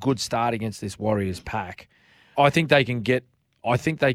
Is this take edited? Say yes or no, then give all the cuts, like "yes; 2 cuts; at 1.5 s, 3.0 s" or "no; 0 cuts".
yes; 1 cut; at 2.3 s